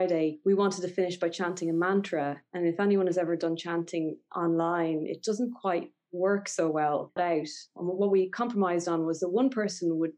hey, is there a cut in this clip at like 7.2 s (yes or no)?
yes